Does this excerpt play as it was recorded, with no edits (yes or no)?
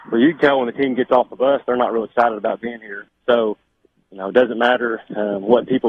no